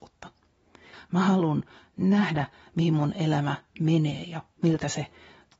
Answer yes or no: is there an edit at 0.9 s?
yes